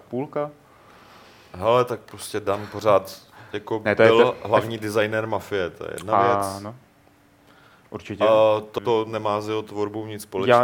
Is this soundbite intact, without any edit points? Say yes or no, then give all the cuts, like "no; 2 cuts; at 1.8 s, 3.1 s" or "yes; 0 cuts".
no; 1 cut; at 8.8 s